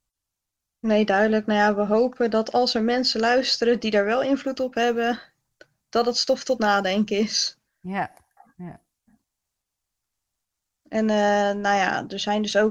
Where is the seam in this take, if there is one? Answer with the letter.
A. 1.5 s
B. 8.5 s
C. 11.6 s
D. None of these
D